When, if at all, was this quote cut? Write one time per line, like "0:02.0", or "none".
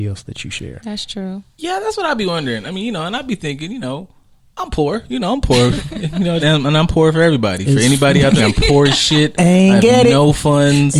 0:06.4
0:08.4